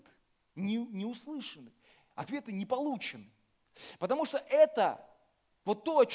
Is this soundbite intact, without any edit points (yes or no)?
yes